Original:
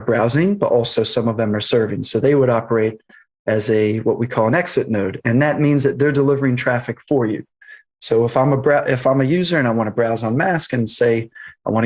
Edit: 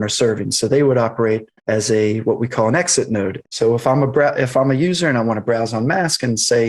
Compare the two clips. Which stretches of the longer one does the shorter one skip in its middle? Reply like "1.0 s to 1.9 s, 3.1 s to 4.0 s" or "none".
3.1 s to 3.4 s, 5.2 s to 7.9 s